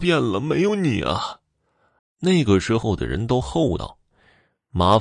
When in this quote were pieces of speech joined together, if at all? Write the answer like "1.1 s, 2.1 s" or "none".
2.0 s

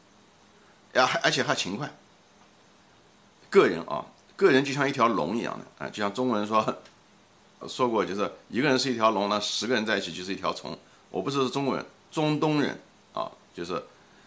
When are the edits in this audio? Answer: 7.6 s

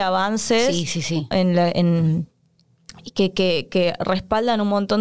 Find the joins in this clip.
1.3 s

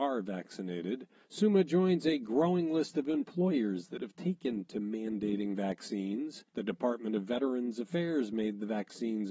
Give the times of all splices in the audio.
1.2 s, 6.5 s

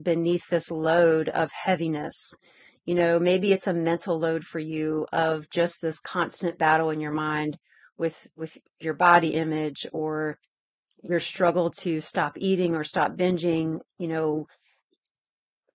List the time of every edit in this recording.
none

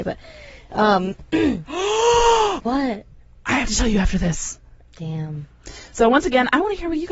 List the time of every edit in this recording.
4.9 s

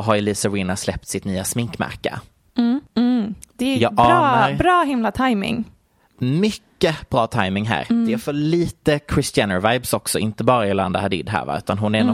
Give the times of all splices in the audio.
none

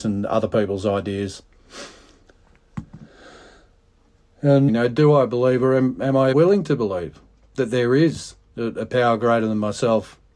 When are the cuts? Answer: 4.7 s, 6.3 s

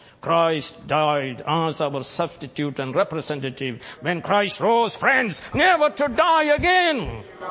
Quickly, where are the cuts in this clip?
4.0 s, 5.5 s

